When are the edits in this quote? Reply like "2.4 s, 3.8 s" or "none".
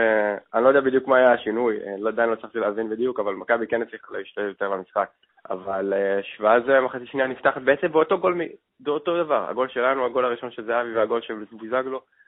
5.3 s